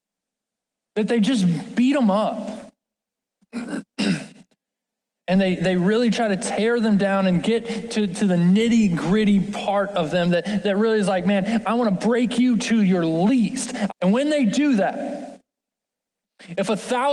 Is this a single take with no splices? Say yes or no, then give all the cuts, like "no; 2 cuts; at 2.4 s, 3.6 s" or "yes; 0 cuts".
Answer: no; 2 cuts; at 5.6 s, 13.9 s